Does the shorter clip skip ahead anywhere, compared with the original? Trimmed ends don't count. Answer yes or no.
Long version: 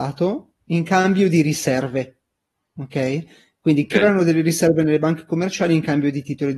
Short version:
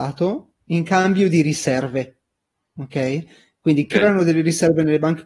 no